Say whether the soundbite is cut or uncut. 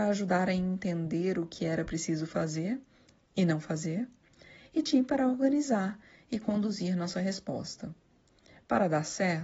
uncut